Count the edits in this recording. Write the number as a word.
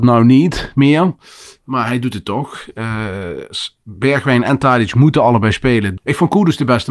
one